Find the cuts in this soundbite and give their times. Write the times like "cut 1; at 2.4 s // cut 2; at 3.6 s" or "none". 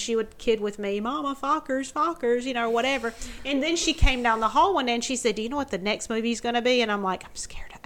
none